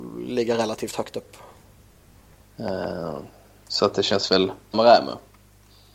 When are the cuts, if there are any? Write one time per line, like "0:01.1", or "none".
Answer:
0:02.4
0:04.7